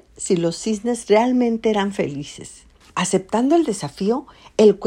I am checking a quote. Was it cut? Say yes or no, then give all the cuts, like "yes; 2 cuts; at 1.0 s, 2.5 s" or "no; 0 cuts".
no; 0 cuts